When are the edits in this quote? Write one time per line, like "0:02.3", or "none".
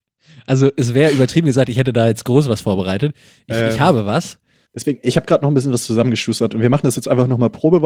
none